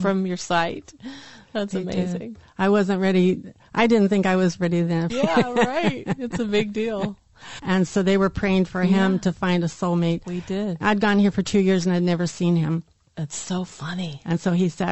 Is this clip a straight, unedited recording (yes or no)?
no